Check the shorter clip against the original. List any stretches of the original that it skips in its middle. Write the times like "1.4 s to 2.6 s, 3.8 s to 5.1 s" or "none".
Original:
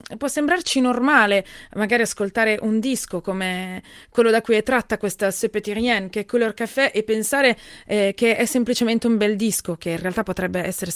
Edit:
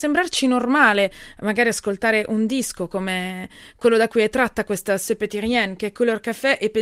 none